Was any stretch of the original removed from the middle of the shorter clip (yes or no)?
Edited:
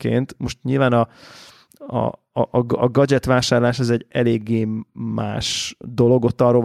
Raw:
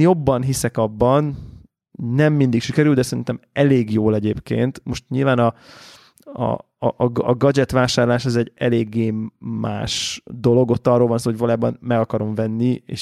no